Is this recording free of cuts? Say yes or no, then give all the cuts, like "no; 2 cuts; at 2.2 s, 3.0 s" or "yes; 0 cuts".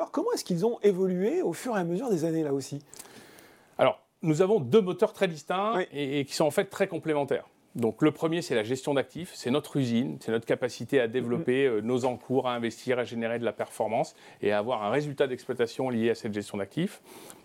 yes; 0 cuts